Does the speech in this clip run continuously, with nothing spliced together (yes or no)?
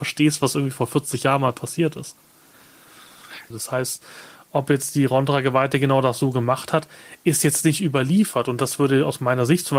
no